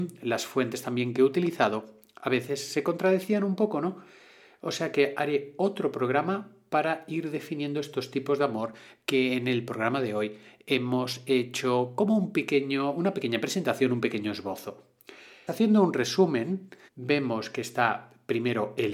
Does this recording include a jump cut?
yes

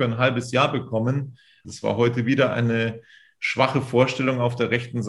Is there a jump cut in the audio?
yes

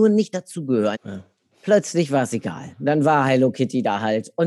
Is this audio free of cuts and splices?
no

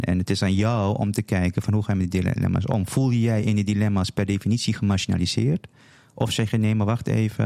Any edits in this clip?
no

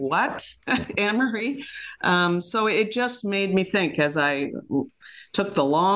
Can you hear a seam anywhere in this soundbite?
no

